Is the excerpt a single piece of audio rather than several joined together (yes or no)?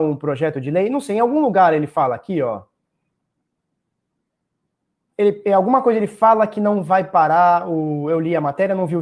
yes